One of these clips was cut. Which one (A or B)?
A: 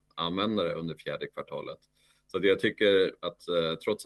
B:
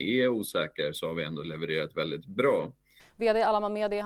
B